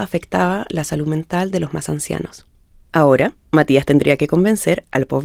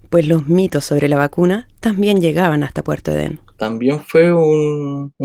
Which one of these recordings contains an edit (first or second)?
first